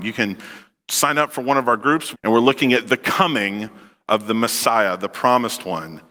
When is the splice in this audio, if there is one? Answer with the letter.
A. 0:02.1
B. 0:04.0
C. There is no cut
A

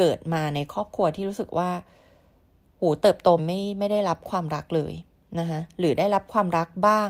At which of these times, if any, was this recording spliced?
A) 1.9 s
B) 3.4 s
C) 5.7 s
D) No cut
B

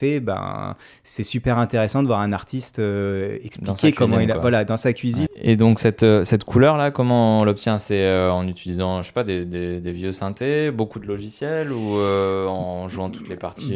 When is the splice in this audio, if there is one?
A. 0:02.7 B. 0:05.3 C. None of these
B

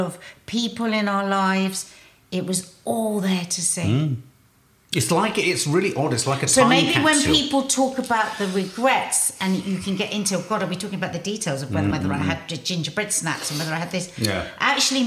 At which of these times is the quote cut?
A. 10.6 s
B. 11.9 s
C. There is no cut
B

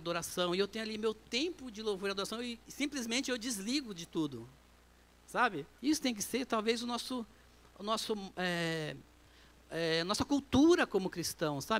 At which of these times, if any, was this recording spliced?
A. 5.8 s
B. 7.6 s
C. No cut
A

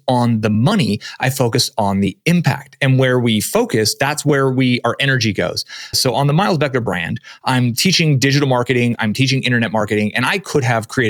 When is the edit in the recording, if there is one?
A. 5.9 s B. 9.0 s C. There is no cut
A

